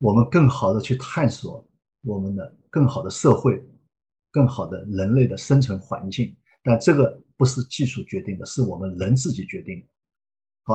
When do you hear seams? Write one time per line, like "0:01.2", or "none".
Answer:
none